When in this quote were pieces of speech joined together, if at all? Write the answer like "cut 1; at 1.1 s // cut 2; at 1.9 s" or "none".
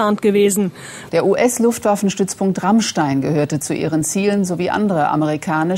cut 1; at 1.1 s